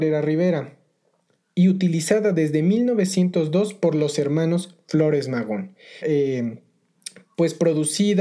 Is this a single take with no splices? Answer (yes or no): no